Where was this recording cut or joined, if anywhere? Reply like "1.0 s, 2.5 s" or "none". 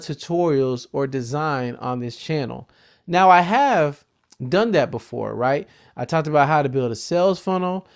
none

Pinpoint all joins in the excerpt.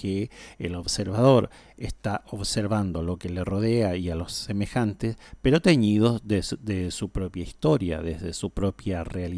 none

